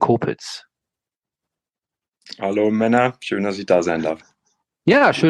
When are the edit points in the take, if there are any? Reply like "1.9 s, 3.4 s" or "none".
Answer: none